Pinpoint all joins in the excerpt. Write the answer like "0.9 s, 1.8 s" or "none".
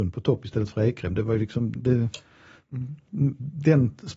1.8 s